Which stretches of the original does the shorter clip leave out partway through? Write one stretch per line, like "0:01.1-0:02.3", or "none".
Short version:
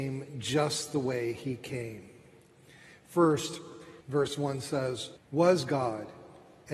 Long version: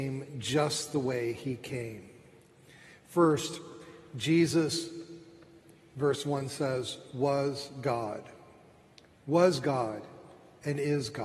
0:04.0-0:05.9
0:07.0-0:09.1